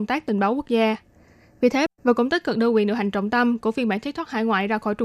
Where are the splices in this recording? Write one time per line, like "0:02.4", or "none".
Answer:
0:01.9